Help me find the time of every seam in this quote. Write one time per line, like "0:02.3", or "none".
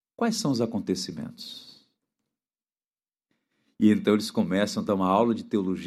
none